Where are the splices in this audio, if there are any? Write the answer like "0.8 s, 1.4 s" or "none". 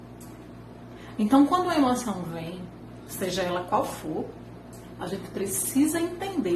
none